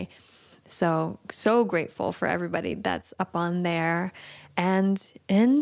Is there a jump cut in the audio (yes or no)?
no